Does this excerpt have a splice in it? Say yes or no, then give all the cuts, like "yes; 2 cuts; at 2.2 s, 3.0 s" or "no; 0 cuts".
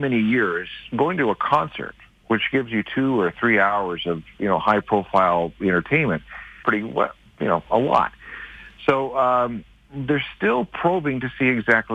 yes; 1 cut; at 6.6 s